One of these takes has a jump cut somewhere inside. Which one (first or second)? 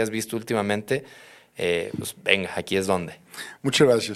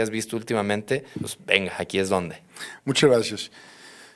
second